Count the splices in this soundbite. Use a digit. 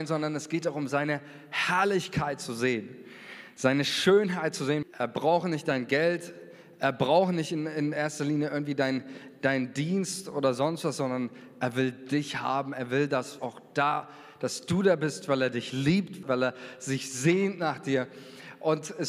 3